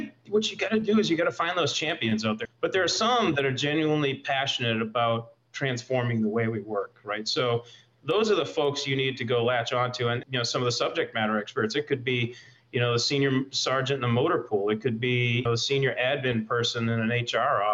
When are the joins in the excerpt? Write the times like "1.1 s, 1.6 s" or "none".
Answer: 2.4 s, 10.2 s, 15.5 s